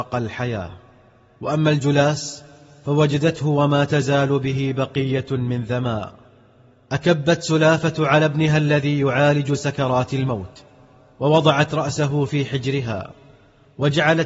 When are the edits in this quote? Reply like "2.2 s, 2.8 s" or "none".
none